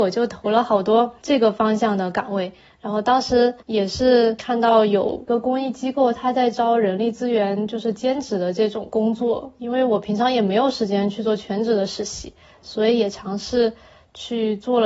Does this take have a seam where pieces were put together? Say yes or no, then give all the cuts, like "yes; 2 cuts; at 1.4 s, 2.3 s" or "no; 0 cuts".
yes; 1 cut; at 4.4 s